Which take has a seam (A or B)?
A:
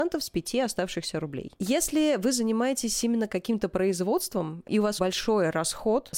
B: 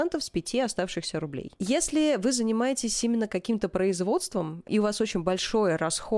A